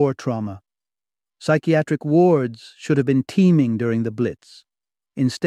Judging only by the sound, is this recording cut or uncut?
uncut